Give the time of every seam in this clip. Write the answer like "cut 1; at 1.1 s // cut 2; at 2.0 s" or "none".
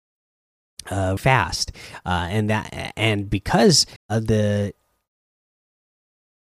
cut 1; at 1.2 s // cut 2; at 4.0 s